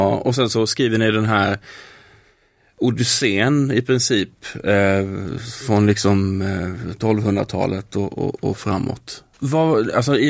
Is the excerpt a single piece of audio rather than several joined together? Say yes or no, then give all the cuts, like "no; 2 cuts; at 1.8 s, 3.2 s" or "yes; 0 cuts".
no; 1 cut; at 9.3 s